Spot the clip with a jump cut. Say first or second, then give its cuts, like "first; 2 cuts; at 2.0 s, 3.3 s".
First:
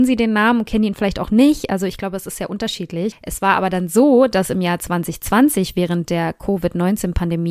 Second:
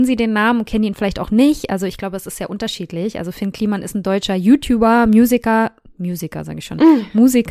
first; 1 cut; at 3.1 s